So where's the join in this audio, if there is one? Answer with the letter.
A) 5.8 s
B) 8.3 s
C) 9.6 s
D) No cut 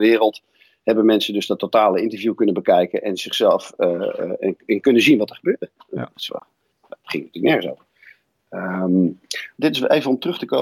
C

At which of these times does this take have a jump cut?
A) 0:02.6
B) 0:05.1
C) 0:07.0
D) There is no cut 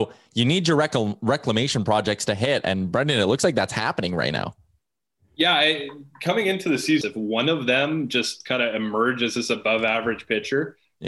C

